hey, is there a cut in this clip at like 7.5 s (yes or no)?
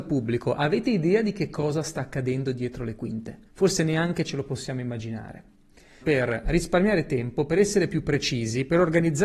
no